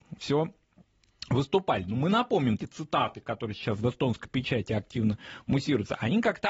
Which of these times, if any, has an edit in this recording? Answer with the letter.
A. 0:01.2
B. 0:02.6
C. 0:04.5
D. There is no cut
B